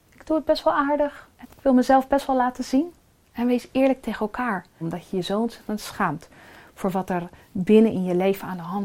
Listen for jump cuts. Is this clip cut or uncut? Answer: cut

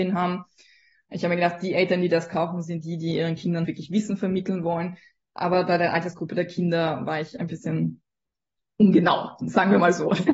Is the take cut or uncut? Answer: cut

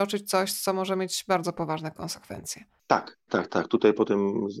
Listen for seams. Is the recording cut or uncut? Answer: cut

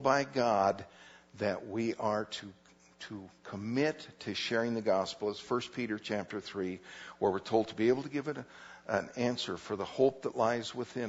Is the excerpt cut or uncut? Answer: uncut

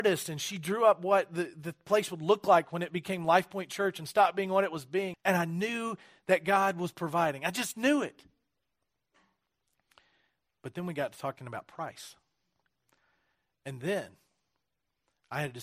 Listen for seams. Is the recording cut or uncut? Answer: cut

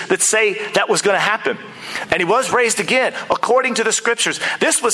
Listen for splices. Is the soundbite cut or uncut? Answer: cut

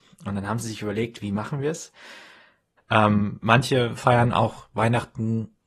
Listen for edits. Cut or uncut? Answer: cut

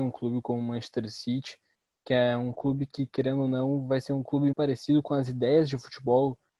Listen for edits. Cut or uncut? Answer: cut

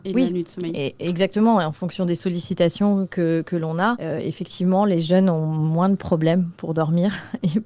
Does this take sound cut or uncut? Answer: uncut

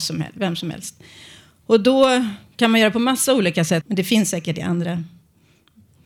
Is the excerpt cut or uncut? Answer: cut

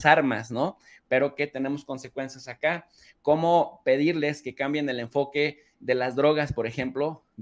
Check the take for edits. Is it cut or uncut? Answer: cut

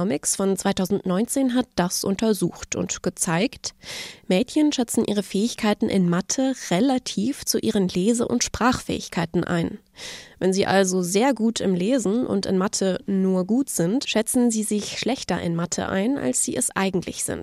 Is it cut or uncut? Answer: uncut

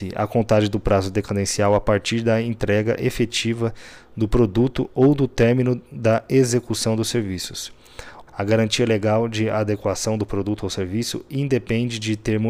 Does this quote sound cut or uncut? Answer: cut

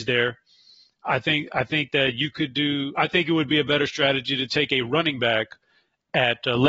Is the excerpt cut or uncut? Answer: uncut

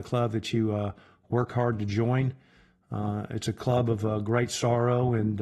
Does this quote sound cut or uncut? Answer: uncut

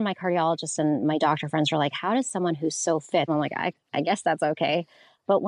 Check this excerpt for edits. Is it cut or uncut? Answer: cut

